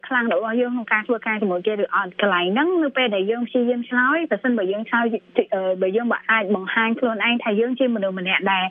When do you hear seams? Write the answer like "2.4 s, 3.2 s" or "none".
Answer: none